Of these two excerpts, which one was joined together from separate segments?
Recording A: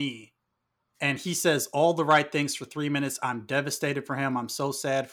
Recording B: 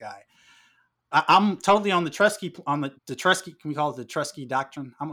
B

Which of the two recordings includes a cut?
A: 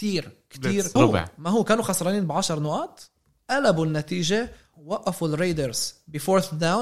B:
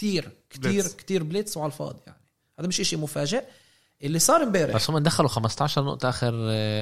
A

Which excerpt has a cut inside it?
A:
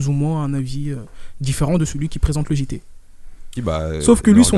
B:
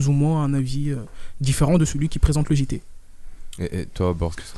A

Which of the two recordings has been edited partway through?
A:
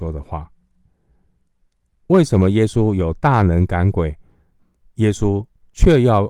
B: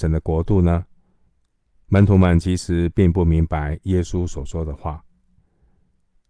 B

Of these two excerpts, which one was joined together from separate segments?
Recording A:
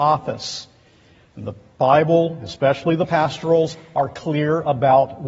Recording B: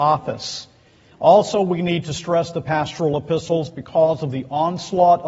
B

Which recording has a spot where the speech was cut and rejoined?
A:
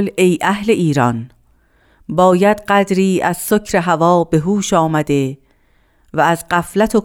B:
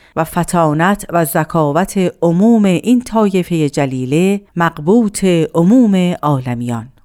B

